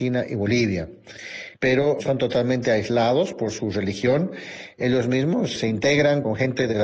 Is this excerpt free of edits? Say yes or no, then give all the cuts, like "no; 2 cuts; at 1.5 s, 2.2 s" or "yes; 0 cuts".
no; 2 cuts; at 1.5 s, 5.6 s